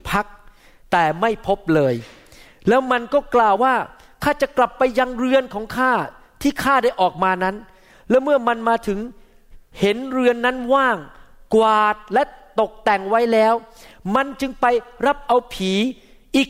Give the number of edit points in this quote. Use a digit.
1